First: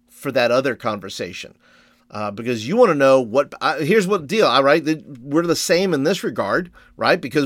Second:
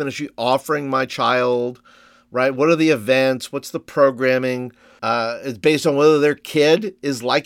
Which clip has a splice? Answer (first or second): second